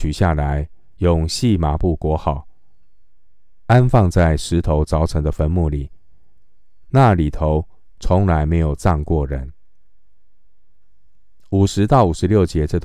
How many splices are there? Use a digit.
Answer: 0